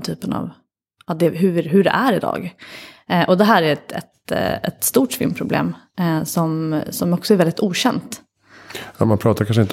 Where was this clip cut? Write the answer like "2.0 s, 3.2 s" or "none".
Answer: none